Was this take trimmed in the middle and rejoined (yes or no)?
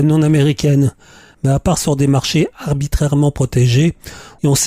no